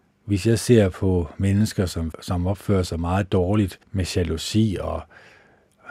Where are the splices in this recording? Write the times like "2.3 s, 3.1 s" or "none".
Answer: 2.1 s, 3.8 s